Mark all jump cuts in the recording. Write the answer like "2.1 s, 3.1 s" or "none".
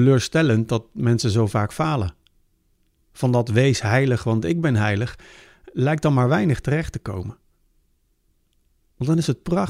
none